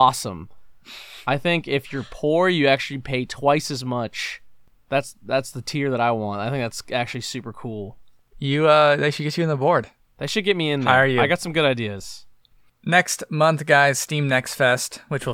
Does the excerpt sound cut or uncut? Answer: uncut